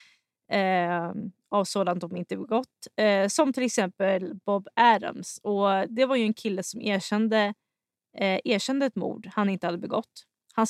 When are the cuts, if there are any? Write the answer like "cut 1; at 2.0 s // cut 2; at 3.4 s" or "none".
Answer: none

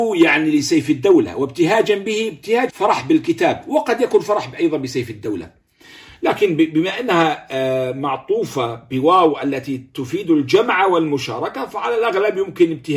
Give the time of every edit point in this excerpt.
cut 1; at 2.7 s

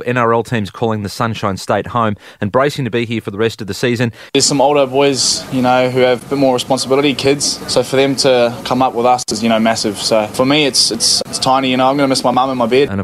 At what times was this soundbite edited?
cut 1; at 4.3 s

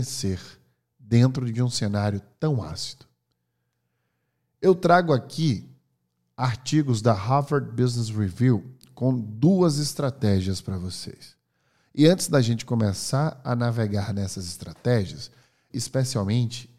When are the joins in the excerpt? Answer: cut 1; at 15.7 s

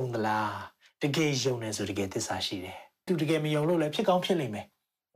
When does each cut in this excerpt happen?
cut 1; at 3.1 s

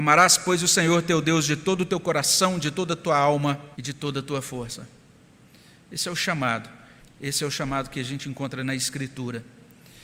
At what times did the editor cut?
cut 1; at 3.7 s // cut 2; at 7.0 s

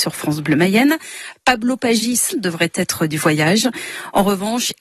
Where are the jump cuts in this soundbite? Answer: cut 1; at 2.3 s

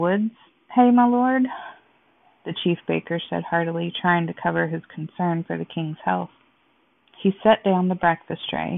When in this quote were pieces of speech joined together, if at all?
none

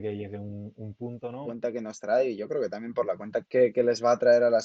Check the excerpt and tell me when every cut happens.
cut 1; at 1.4 s // cut 2; at 3.4 s

